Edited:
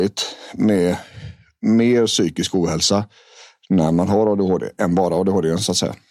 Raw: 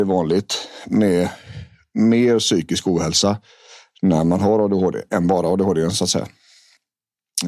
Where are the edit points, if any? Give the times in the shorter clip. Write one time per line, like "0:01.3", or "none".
none